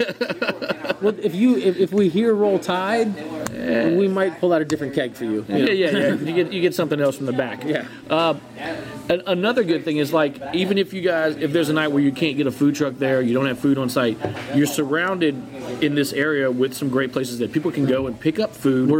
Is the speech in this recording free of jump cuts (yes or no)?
yes